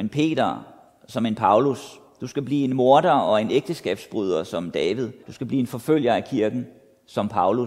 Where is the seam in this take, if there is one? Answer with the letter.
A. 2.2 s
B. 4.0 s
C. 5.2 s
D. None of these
C